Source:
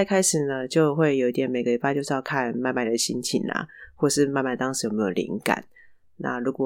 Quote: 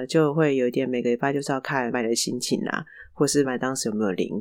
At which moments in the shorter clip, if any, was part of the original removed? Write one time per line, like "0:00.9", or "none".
0:01.9
0:03.4